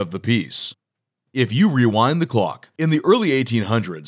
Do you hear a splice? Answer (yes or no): no